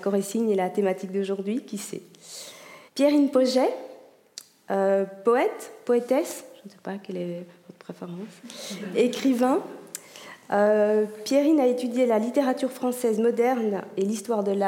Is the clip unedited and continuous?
no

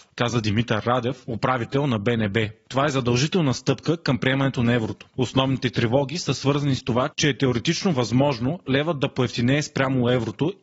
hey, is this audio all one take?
no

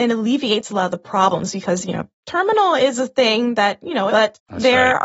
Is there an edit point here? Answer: yes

